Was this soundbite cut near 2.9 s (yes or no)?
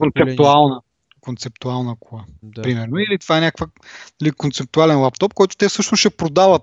no